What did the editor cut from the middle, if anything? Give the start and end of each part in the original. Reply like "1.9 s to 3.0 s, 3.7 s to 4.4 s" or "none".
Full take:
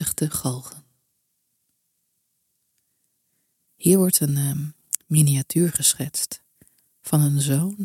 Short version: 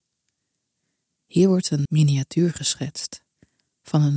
4.3 s to 5.0 s